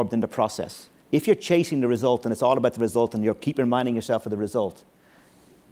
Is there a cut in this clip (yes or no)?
yes